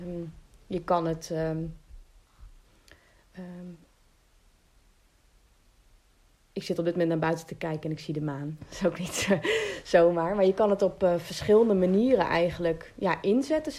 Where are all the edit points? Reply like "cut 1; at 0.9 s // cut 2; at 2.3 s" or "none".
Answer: none